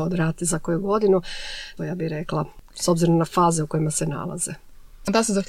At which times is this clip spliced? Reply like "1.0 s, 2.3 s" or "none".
1.8 s